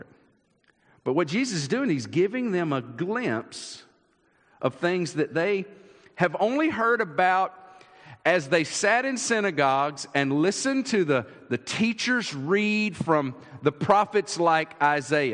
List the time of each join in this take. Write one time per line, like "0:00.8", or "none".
none